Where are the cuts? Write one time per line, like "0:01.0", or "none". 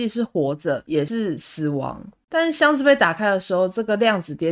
0:02.3

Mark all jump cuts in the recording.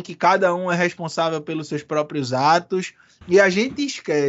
0:03.2

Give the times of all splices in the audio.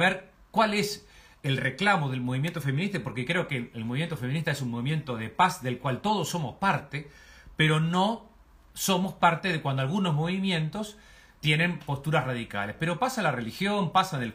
none

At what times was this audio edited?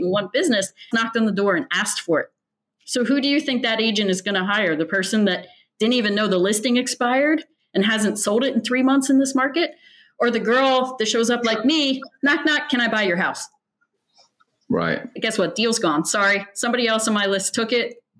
0:00.9
0:15.2

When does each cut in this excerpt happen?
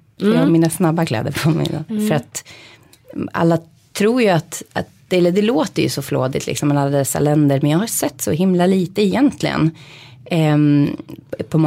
0:01.9

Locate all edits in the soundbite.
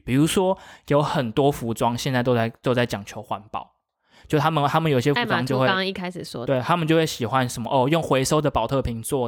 none

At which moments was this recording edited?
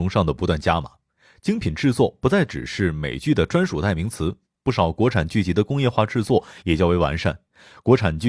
none

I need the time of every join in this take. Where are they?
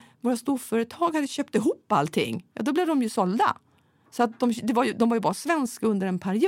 none

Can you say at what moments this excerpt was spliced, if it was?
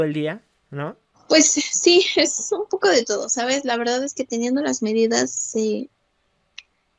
0:01.1

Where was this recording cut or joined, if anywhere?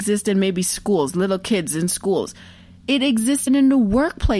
0:03.5

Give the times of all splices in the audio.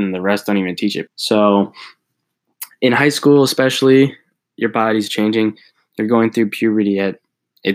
0:01.1

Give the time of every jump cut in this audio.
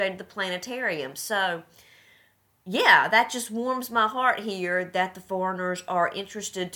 none

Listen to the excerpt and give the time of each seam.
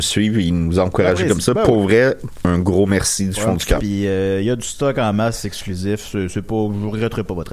0:03.8

